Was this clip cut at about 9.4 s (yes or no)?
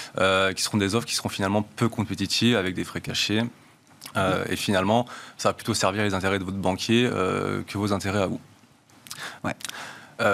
yes